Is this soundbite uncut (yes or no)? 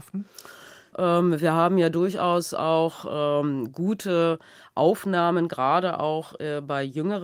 no